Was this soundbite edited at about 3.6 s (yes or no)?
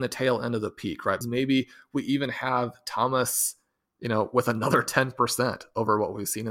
no